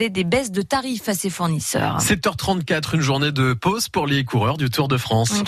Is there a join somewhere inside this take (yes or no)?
no